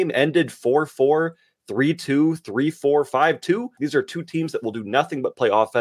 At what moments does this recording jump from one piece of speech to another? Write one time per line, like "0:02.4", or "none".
0:03.8